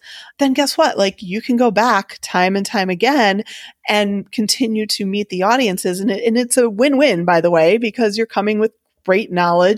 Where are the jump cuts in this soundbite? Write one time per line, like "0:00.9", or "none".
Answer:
none